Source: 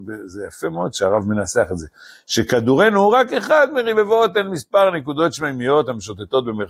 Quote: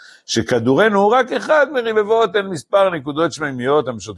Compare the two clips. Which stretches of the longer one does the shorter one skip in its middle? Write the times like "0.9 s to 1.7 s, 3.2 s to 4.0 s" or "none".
none